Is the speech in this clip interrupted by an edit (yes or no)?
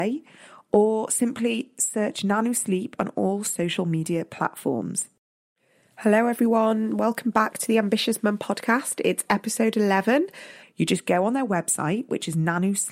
yes